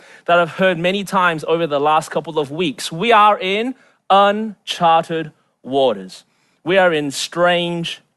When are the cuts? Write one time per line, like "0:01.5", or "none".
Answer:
none